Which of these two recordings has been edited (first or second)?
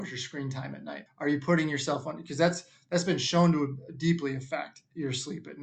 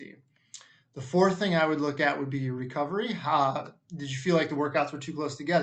first